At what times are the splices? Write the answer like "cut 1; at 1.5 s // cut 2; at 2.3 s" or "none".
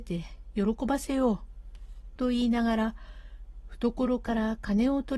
none